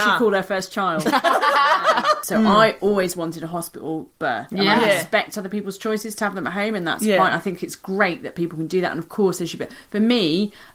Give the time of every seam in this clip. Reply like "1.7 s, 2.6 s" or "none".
none